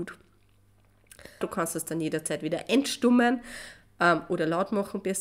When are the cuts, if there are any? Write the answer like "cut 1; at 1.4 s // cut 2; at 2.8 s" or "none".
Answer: cut 1; at 1.4 s